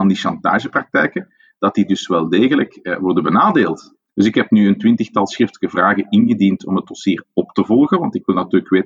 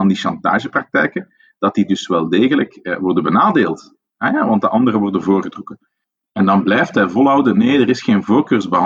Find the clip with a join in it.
first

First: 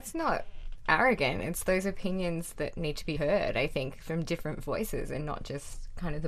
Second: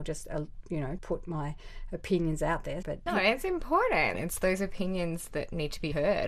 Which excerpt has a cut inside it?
second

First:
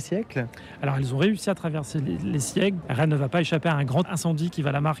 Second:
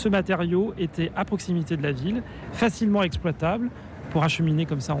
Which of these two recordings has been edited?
first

